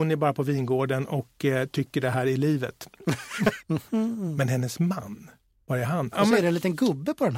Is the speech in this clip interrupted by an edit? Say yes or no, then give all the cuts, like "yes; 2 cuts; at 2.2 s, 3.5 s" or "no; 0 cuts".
yes; 2 cuts; at 3.6 s, 6.1 s